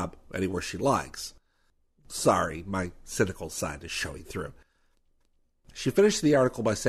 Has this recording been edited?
no; 0 cuts

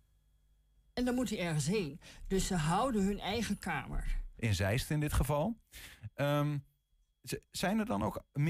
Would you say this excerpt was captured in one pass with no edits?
no; 1 cut; at 4.4 s

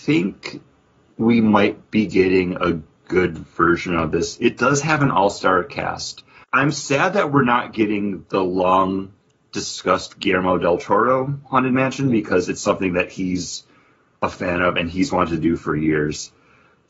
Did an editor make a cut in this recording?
yes; 1 cut; at 6.4 s

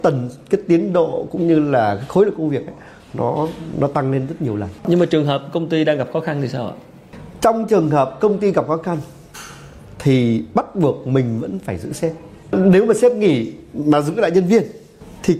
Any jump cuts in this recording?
yes; 1 cut; at 4.8 s

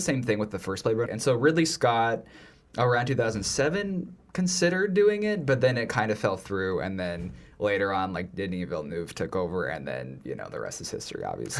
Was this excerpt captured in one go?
no; 1 cut; at 1.1 s

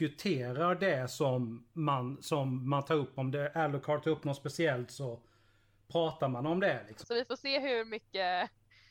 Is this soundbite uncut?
no; 1 cut; at 7.0 s

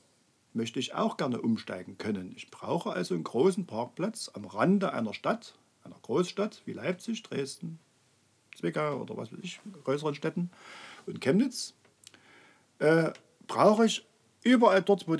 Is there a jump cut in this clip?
no; 0 cuts

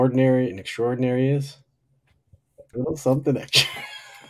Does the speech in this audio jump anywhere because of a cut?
yes; 1 cut; at 2.7 s

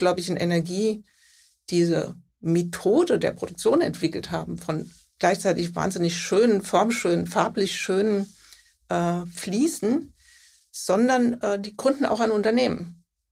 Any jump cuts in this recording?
no; 0 cuts

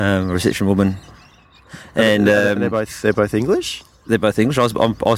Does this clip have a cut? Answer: no; 0 cuts

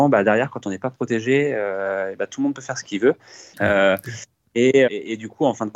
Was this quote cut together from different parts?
yes; 2 cuts; at 3.5 s, 4.9 s

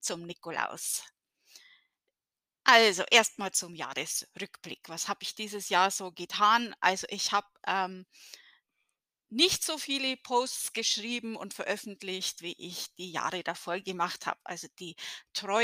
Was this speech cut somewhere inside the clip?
no; 0 cuts

